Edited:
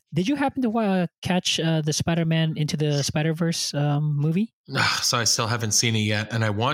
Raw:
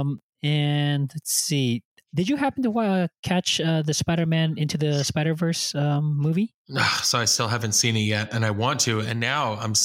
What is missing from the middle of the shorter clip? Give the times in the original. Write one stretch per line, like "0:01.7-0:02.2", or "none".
none